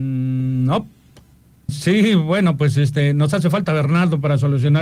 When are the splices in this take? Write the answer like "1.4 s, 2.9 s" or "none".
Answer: 1.7 s